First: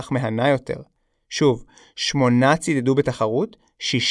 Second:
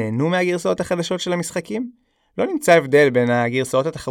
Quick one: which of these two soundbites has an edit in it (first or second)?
first